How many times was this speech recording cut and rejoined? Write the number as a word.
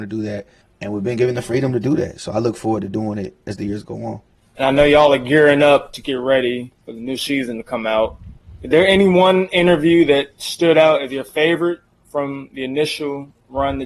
zero